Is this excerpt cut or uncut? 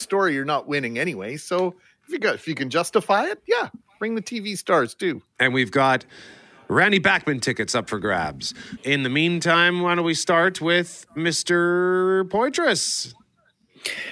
cut